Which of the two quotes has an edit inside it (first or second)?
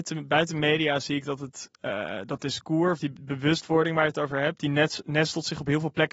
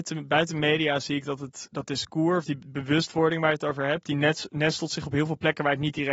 second